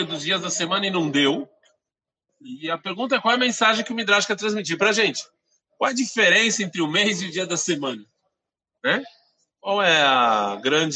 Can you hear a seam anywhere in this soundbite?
yes; 1 cut; at 2.3 s

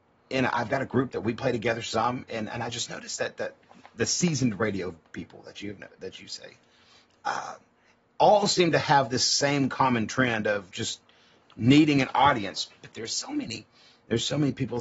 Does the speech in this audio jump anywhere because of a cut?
yes; 1 cut; at 12.8 s

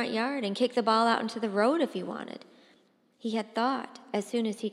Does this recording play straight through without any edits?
yes; 0 cuts

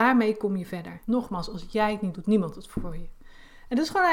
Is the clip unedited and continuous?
no; 2 cuts; at 1.0 s, 2.1 s

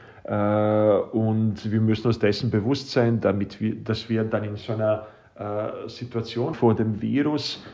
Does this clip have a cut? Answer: yes; 1 cut; at 6.5 s

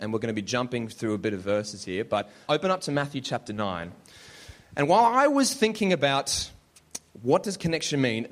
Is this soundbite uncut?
no; 1 cut; at 2.5 s

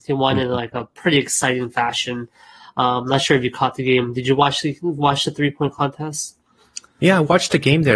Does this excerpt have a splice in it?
no; 0 cuts

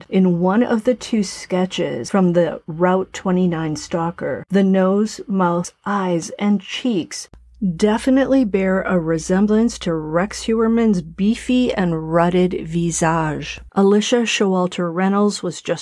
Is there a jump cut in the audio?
yes; 1 cut; at 13.7 s

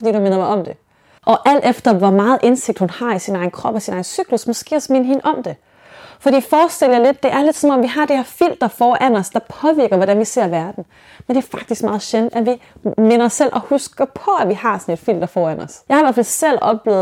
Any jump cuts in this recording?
yes; 1 cut; at 1.2 s

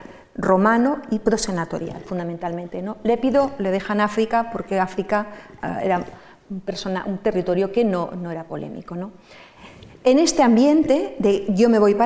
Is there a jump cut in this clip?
no; 0 cuts

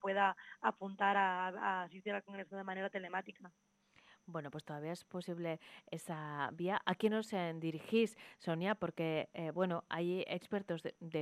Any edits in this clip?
no; 0 cuts

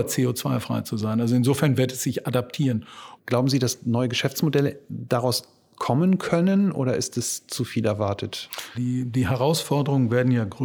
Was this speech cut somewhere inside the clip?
yes; 2 cuts; at 3.2 s, 8.7 s

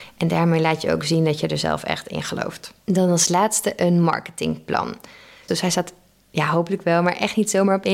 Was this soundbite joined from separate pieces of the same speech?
yes; 2 cuts; at 2.8 s, 5.5 s

